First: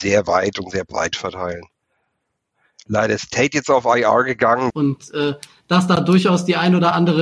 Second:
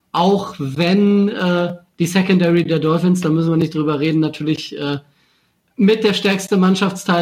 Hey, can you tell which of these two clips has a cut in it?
first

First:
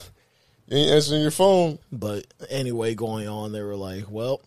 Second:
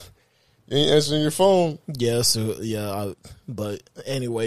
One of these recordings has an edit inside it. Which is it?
first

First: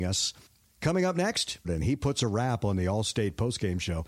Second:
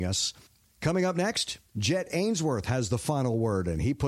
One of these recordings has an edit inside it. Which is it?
first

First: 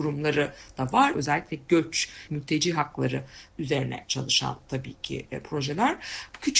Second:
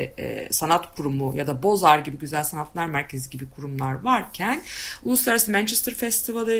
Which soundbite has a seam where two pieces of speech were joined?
first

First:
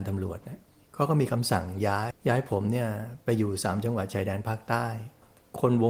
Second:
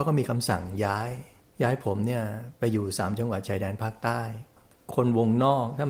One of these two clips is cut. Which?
first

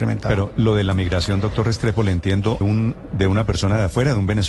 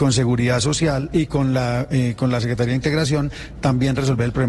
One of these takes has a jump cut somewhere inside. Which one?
first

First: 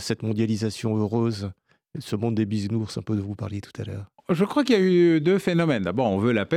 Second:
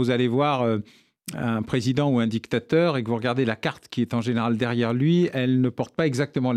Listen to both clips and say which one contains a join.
first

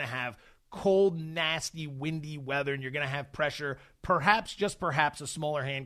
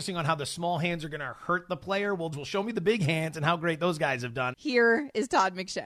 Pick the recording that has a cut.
second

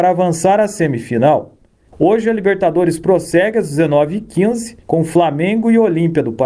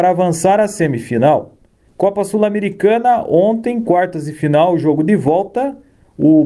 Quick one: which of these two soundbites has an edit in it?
first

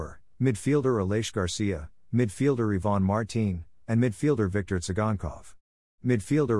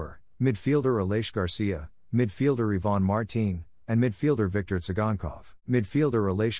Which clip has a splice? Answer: second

